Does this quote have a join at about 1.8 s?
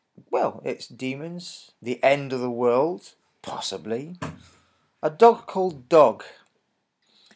yes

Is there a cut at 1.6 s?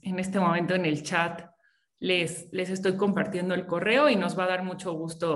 no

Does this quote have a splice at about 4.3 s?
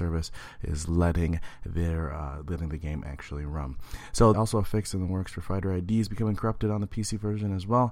yes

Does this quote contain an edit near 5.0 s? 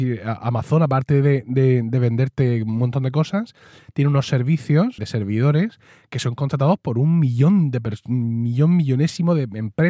yes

